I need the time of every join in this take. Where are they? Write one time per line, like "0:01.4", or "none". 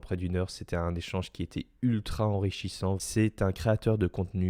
0:03.0